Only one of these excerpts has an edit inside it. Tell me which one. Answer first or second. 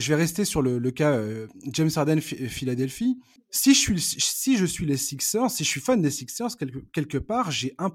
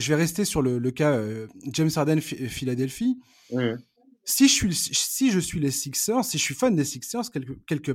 first